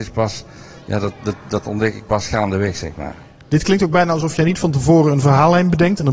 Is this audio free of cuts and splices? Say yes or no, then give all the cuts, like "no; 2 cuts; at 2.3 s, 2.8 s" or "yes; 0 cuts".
yes; 0 cuts